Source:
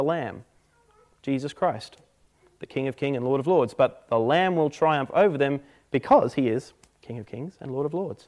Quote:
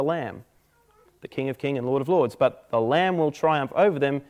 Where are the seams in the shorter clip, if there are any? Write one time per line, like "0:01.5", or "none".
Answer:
0:01.1

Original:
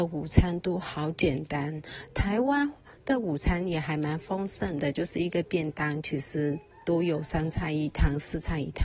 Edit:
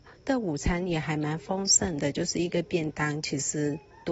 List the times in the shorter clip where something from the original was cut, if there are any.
none

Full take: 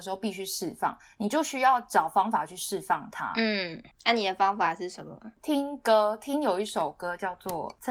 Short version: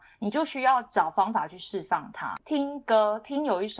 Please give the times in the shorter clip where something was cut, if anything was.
0:02.4

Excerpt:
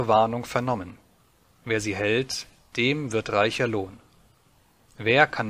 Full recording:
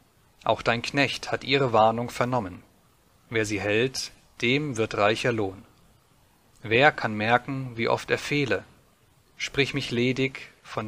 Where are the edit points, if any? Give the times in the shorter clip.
none

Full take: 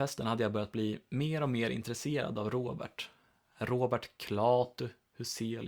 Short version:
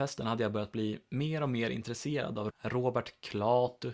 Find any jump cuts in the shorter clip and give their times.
0:02.5

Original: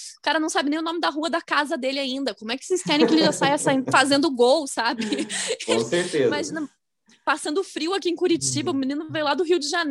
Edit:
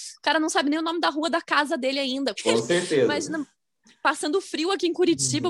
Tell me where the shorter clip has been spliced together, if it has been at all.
0:02.4

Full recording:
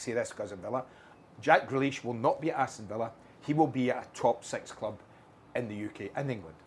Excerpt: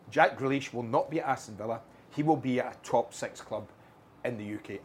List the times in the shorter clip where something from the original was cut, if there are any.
none

